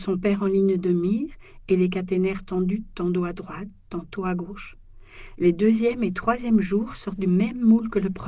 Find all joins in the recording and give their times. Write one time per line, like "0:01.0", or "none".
0:05.4